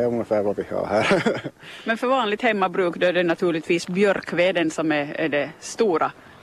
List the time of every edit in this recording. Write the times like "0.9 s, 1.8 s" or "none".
none